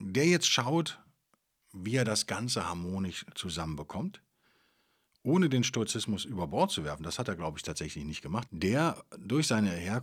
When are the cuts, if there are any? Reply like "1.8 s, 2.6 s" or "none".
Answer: 8.5 s